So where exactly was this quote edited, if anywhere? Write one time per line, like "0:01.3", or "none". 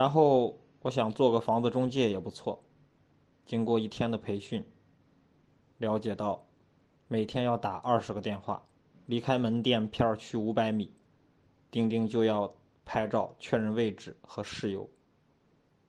0:08.9